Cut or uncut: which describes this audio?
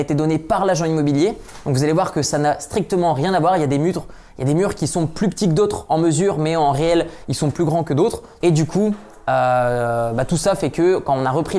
cut